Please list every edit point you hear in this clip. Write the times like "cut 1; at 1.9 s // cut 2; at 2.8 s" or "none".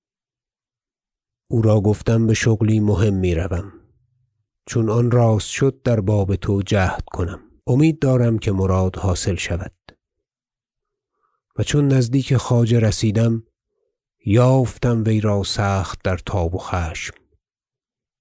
cut 1; at 7.6 s